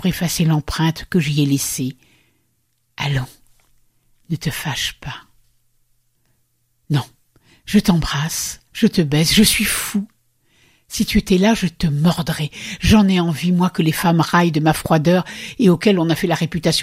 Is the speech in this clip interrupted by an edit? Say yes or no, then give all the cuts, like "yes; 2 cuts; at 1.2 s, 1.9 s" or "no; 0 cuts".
no; 0 cuts